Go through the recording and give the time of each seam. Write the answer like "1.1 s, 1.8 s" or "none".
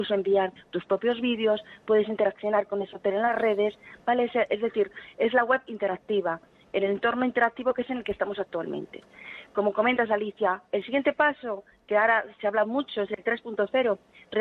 none